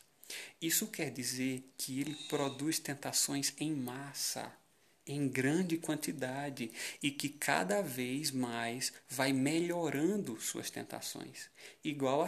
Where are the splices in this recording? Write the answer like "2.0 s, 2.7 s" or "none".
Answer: none